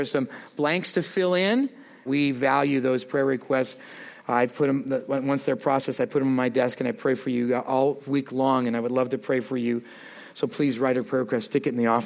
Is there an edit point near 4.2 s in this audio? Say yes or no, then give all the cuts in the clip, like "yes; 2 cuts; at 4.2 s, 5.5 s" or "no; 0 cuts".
no; 1 cut; at 2.1 s